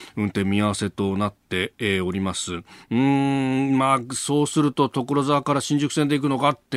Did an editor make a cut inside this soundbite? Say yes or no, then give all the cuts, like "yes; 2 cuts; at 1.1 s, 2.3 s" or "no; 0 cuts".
no; 0 cuts